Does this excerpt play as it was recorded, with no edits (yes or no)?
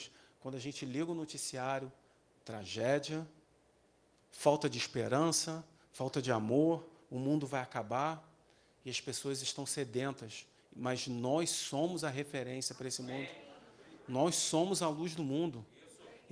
no